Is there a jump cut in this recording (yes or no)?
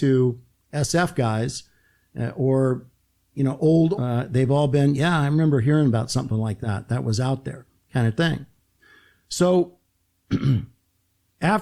yes